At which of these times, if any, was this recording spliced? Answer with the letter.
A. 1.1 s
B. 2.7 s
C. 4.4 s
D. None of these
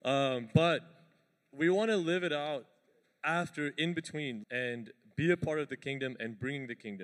C